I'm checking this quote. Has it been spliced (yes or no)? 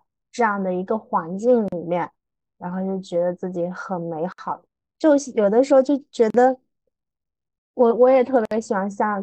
yes